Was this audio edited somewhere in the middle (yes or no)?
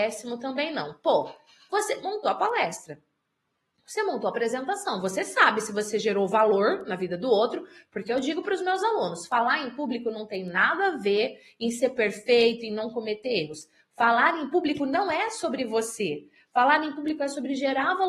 no